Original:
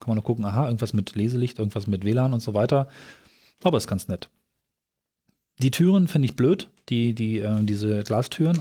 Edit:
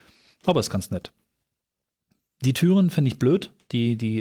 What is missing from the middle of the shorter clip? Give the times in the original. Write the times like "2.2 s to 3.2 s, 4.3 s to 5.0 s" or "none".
none